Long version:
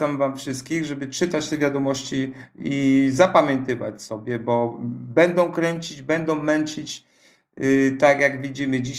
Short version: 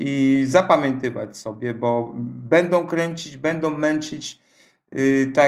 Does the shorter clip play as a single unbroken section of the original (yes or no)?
yes